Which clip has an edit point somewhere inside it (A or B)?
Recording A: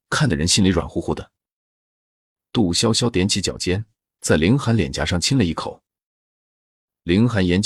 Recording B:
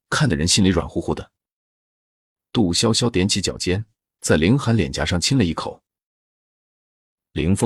B